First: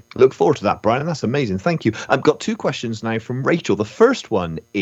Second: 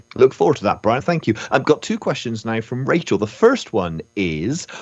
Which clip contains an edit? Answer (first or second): second